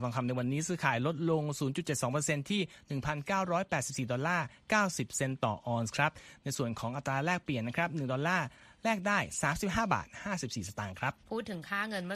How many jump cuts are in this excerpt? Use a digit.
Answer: 1